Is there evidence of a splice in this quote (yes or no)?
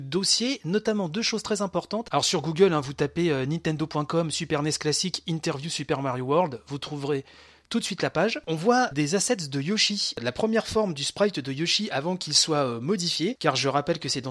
no